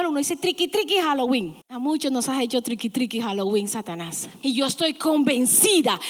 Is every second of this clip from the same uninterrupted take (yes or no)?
no